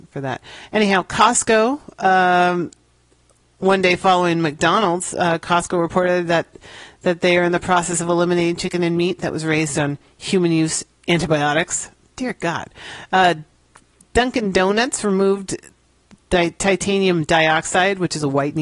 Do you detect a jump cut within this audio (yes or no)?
no